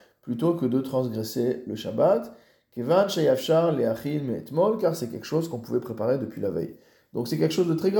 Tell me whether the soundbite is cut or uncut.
uncut